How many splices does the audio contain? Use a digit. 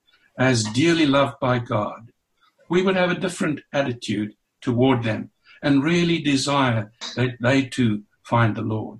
0